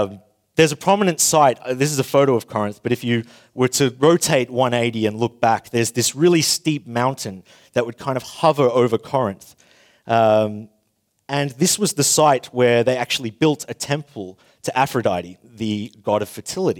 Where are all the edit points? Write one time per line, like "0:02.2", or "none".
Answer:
none